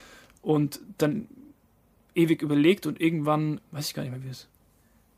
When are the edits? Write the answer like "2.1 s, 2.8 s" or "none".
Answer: 3.6 s